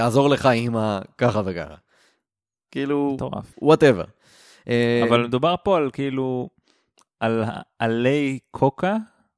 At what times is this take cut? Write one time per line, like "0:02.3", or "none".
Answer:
0:03.5